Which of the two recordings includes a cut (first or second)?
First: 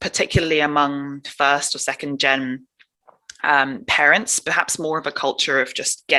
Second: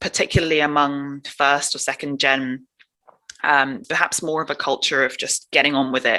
second